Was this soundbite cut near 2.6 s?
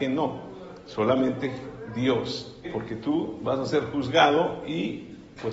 yes; 1 cut; at 2.6 s

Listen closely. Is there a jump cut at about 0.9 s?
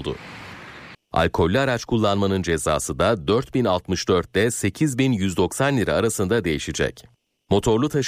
yes; 1 cut; at 0.9 s

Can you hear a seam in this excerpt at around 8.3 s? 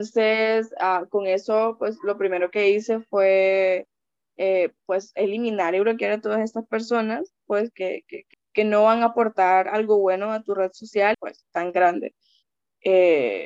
yes; 2 cuts; at 8.3 s, 11.1 s

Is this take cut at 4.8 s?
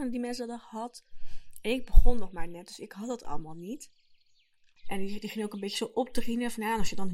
yes; 1 cut; at 4.8 s

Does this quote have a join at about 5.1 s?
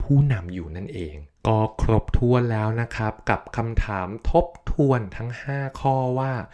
no; 1 cut; at 1.4 s

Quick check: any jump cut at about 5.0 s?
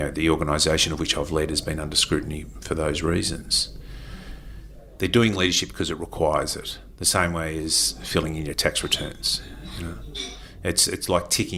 yes; 1 cut; at 5.0 s

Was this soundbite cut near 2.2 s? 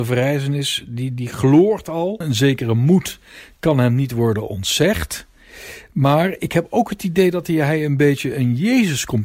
yes; 1 cut; at 2.2 s

